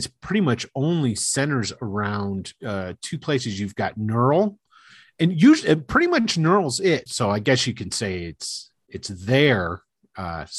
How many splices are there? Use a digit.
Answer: 1